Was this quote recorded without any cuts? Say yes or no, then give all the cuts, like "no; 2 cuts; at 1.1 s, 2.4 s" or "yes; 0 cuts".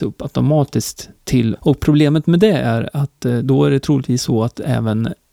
no; 1 cut; at 1.6 s